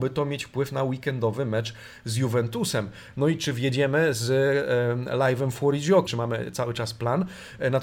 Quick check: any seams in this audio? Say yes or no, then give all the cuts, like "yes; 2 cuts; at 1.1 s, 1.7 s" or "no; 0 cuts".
yes; 2 cuts; at 3.1 s, 6.1 s